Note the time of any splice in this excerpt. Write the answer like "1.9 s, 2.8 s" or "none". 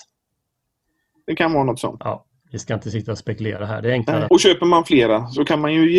2.0 s, 4.3 s